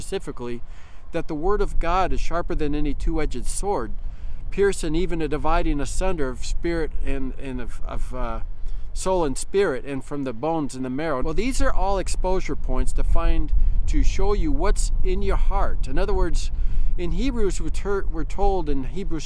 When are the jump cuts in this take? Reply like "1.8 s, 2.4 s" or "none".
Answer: 11.2 s